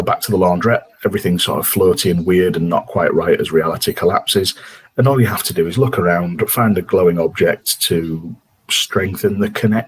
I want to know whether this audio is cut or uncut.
uncut